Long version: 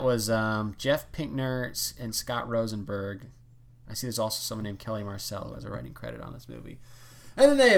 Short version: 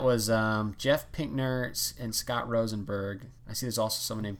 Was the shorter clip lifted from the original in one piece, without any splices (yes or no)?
no